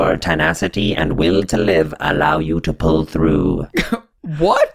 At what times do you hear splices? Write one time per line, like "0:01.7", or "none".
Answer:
none